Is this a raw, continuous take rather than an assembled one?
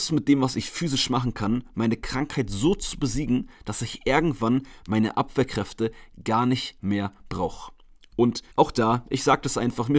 no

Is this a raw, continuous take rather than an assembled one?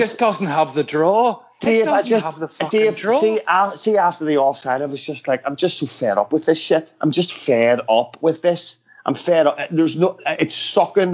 yes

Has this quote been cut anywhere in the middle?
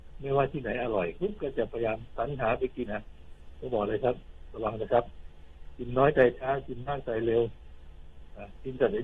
yes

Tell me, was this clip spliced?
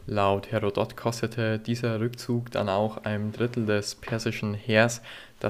no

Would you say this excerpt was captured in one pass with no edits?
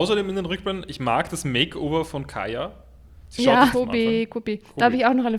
no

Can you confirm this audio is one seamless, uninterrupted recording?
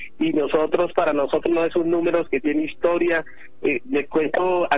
no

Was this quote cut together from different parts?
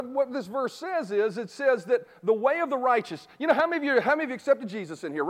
no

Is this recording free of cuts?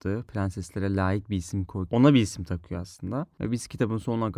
no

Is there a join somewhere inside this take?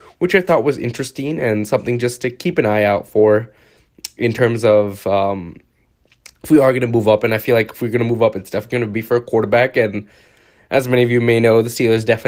no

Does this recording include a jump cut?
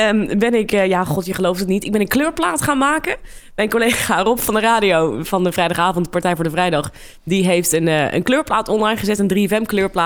no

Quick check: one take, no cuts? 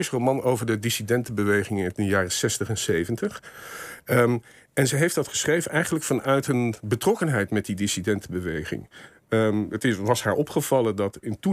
yes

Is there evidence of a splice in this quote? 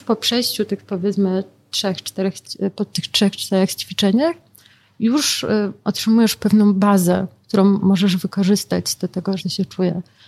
yes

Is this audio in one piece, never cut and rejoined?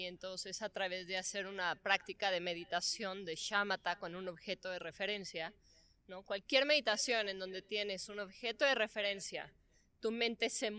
yes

